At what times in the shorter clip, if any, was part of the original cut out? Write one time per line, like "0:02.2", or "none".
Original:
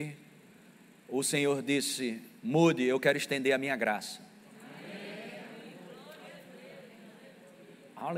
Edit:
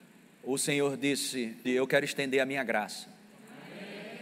0:01.6